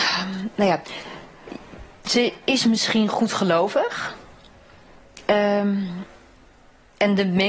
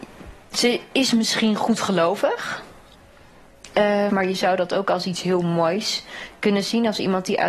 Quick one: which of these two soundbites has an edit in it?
second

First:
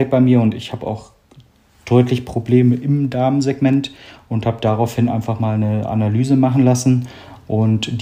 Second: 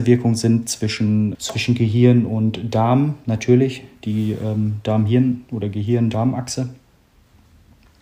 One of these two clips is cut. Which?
second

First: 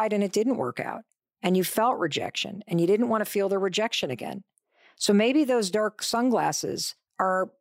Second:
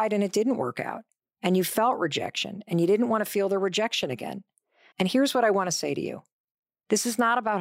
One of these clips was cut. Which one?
second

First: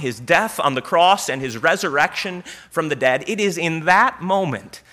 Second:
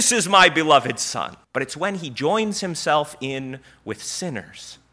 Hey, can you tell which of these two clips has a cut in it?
second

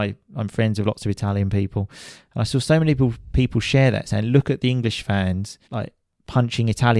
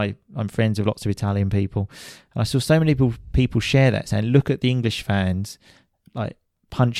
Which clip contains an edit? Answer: first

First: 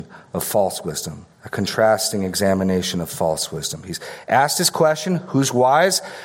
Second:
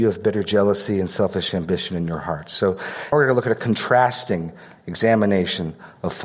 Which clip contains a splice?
second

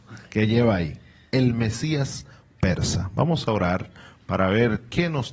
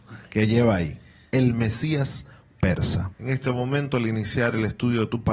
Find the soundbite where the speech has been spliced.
second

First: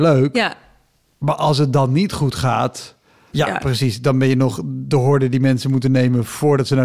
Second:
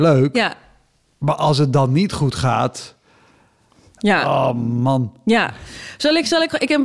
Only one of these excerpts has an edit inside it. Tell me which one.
first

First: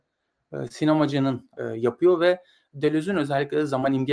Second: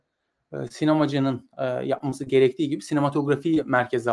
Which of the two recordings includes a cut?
first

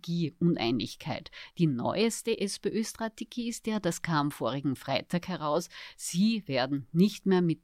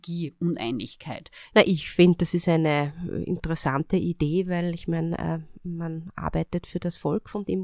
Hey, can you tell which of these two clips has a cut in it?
second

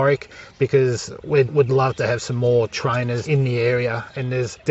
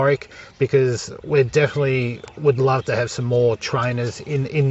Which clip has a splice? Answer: first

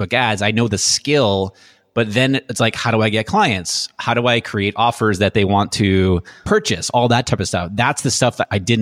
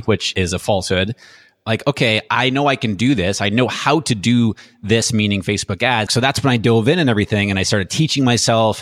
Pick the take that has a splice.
second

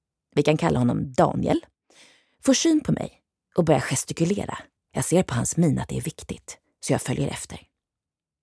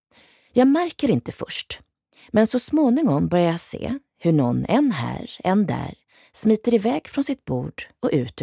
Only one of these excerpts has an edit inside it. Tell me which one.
first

